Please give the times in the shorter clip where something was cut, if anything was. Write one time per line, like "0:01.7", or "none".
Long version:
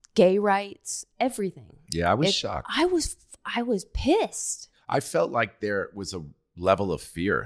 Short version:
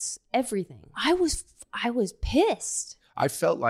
0:00.9